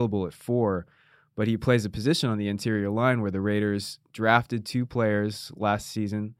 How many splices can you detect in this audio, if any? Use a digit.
0